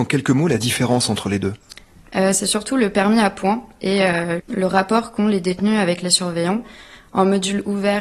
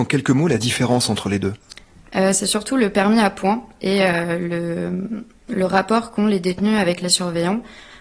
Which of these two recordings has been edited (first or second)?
first